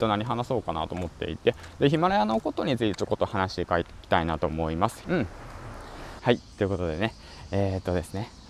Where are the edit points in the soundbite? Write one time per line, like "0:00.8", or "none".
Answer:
0:05.0
0:06.2